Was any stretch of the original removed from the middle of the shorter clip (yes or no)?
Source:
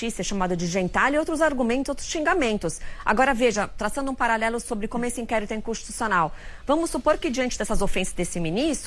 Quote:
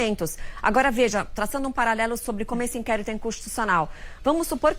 no